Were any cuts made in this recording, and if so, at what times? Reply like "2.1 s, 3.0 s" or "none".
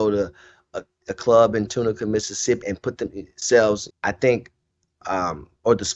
2.6 s, 3.9 s